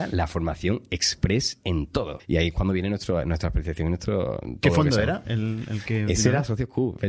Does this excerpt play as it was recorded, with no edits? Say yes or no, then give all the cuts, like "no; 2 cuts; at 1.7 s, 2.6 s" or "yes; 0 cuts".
no; 1 cut; at 2.2 s